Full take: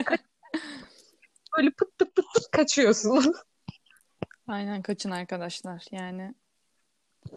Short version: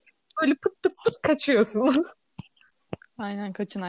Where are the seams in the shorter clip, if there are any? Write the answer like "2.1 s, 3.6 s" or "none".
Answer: 1.0 s